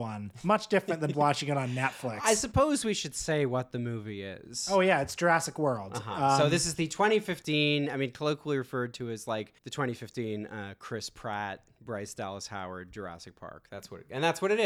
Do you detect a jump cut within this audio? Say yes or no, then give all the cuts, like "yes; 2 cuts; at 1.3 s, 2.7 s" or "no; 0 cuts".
yes; 2 cuts; at 1.1 s, 9.6 s